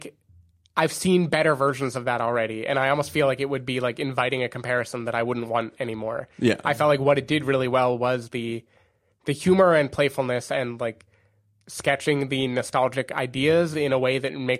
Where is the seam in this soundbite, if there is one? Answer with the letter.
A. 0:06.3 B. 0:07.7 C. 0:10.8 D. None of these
D